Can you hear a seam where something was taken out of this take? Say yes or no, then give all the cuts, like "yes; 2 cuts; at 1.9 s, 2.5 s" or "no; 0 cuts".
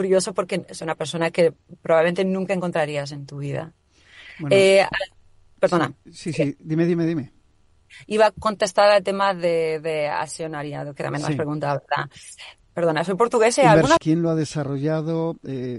yes; 2 cuts; at 12.6 s, 14.0 s